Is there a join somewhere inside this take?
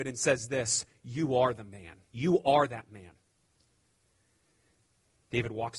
yes; 1 cut; at 2.0 s

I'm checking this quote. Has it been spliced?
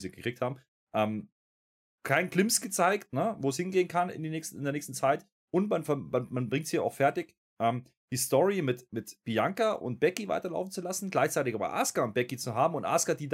no; 0 cuts

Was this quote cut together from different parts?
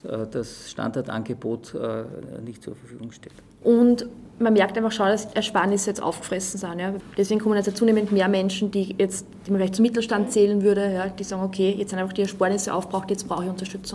yes; 2 cuts; at 3.6 s, 8.7 s

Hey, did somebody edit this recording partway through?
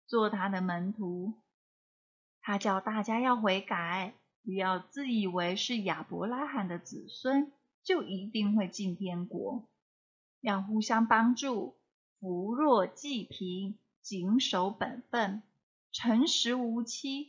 no; 0 cuts

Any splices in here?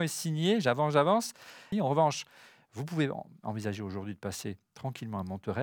yes; 1 cut; at 1.7 s

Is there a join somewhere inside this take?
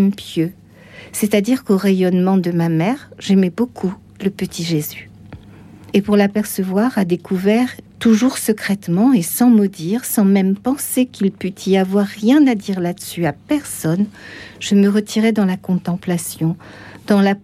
yes; 2 cuts; at 5.9 s, 7.9 s

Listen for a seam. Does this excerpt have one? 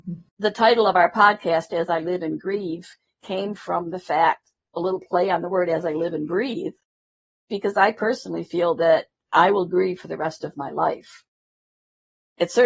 no; 0 cuts

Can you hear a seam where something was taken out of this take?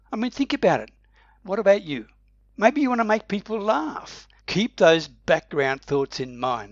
yes; 1 cut; at 4.4 s

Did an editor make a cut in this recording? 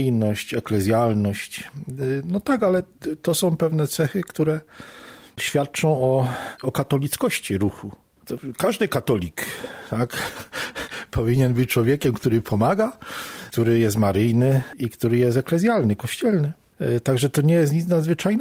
no; 0 cuts

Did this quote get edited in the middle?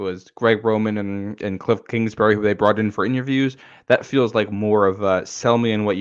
no; 0 cuts

